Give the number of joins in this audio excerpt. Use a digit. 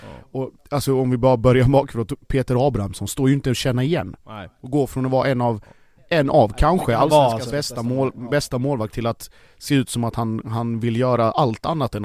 1